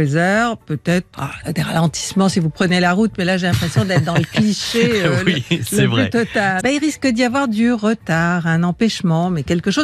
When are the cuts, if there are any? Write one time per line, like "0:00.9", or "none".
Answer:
0:01.1
0:06.6